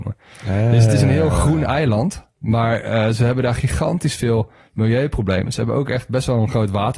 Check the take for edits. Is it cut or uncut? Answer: uncut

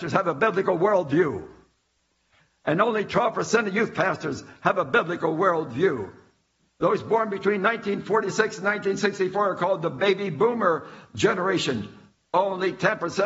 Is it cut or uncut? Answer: cut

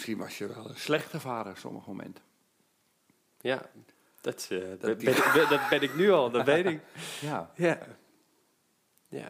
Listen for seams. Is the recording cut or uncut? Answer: uncut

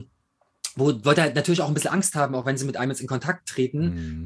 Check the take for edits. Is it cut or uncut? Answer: uncut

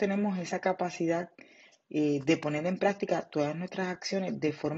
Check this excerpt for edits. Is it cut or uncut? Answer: uncut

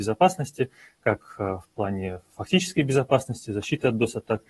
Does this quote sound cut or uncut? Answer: uncut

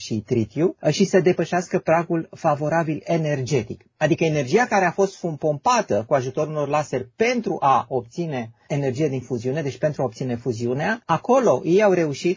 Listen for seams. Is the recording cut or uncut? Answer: cut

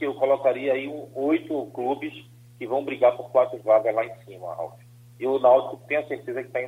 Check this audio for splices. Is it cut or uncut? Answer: uncut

